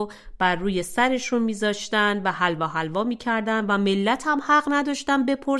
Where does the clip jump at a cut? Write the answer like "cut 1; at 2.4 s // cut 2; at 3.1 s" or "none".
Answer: none